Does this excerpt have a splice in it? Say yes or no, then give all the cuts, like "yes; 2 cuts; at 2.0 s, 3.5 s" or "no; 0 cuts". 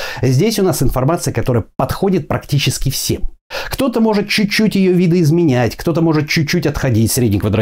no; 0 cuts